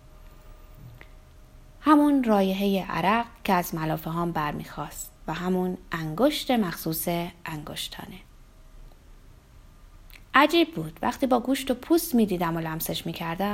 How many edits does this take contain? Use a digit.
1